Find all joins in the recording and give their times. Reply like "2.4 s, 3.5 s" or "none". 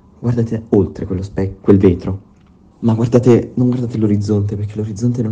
2.7 s